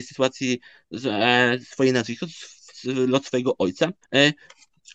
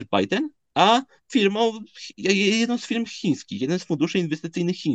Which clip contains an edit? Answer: first; 1 cut; at 4.0 s

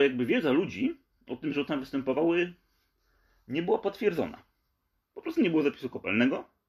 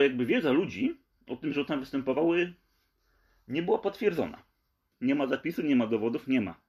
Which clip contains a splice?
second; 1 cut; at 4.9 s

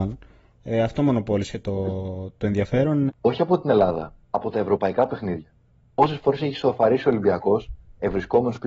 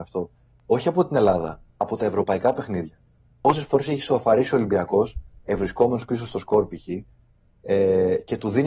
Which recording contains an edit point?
first; 1 cut; at 3.1 s

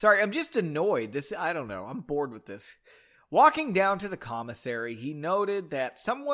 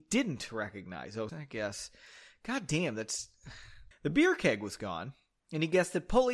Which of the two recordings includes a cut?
second; 2 cuts; at 1.3 s, 3.9 s

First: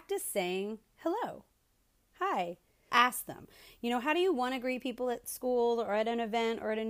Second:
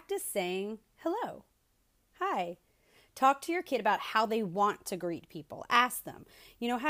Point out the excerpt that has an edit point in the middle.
first; 1 cut; at 2.9 s

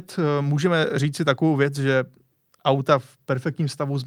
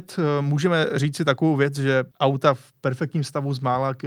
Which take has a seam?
second; 1 cut; at 2.1 s

